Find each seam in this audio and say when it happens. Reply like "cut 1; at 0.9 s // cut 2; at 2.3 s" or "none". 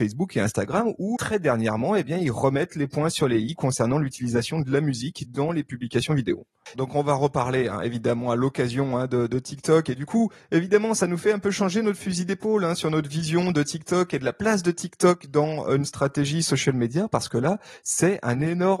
cut 1; at 1.2 s // cut 2; at 6.7 s